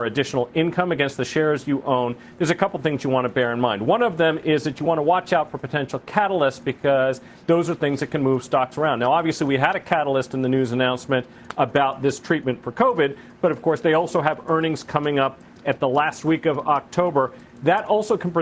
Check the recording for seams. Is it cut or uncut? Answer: uncut